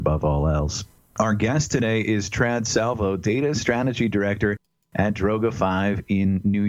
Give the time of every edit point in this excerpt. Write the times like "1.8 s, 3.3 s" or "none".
none